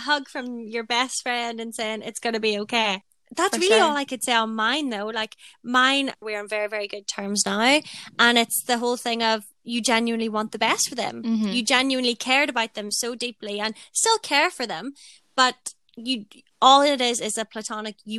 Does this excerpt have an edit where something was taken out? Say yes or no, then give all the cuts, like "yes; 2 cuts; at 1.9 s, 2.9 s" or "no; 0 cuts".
yes; 1 cut; at 6.2 s